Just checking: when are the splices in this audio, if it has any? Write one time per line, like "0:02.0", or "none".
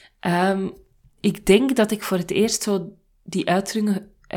none